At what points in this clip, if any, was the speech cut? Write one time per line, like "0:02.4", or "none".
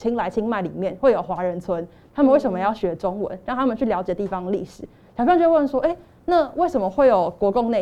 none